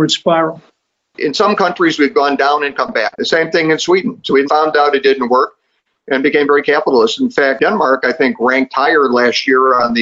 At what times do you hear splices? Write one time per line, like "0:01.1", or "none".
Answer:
0:03.1
0:04.4